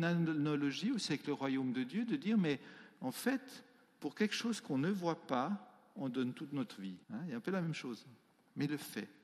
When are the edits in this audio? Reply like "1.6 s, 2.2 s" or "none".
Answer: 7.0 s